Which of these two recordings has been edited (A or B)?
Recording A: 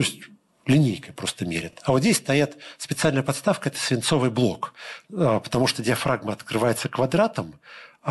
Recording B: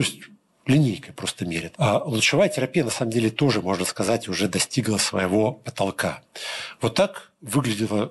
B